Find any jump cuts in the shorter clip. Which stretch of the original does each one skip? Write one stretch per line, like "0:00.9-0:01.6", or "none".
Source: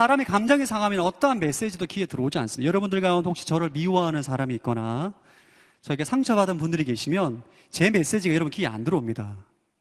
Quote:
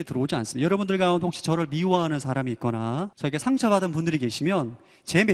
0:05.2-0:05.8

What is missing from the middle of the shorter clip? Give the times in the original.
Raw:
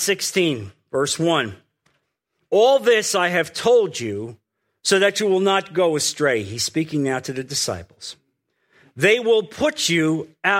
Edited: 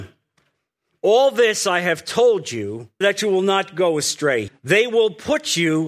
0:04.5-0:05.0
0:06.5-0:08.8

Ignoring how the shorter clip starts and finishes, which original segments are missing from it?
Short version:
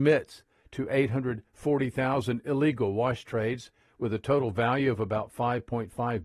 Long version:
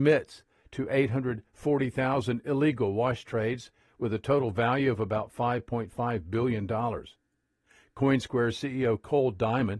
none

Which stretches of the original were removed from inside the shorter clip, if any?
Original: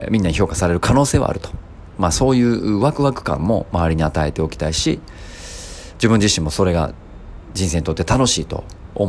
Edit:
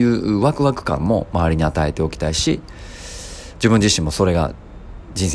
none

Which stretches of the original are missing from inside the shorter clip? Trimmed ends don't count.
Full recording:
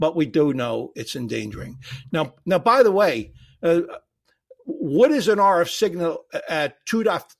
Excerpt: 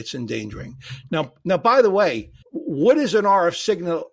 0:03.4-0:04.6

